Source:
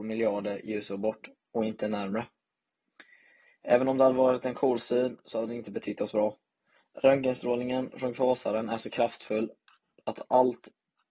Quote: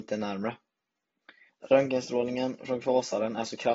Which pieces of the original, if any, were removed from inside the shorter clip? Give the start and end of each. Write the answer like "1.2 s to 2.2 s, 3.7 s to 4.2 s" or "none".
3.2 s to 6.8 s